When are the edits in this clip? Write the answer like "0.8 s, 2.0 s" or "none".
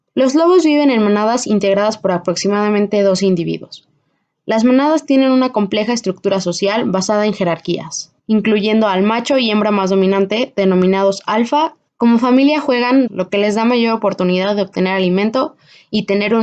8.2 s, 11.9 s, 13.1 s